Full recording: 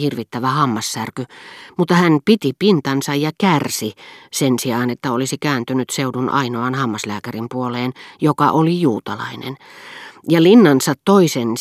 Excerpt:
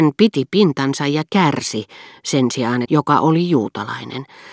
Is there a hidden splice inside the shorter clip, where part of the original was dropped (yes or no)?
yes